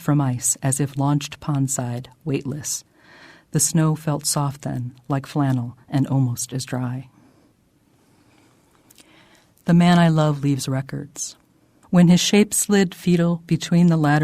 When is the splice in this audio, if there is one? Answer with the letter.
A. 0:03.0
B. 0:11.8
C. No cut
B